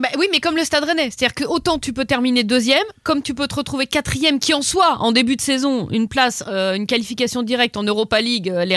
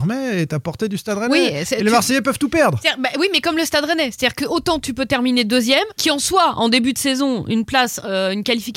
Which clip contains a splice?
second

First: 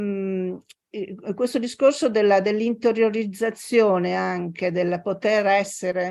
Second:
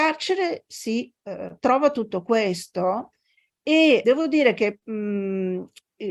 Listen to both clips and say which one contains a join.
second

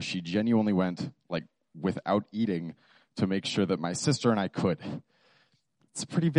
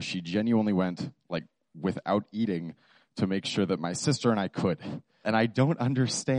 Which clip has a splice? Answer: second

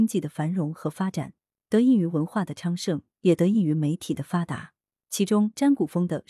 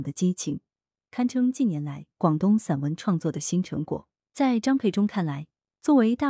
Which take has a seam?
first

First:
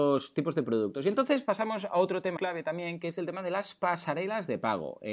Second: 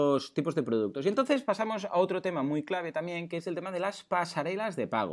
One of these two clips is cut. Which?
first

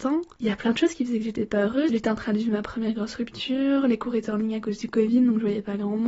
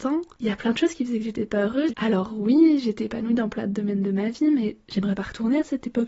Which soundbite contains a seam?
second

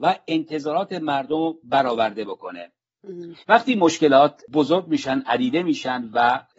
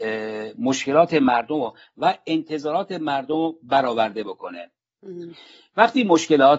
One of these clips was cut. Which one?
first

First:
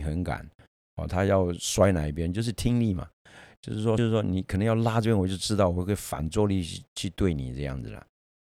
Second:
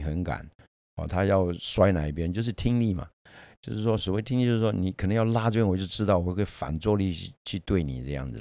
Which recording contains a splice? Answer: first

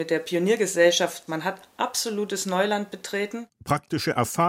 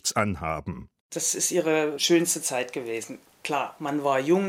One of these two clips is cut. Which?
second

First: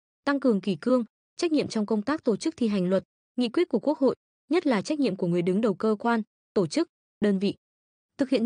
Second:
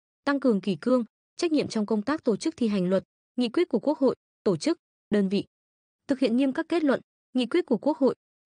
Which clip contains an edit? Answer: second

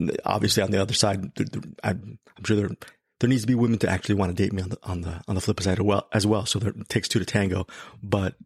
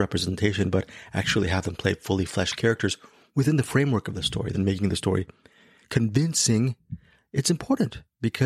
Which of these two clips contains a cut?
second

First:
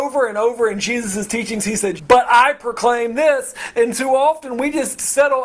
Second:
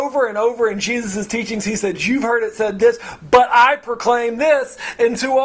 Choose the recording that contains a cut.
first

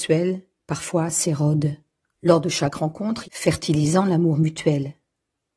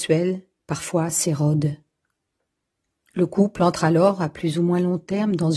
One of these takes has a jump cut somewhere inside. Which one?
first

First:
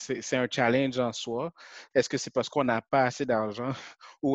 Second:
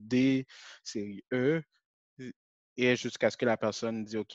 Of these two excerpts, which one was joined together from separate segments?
first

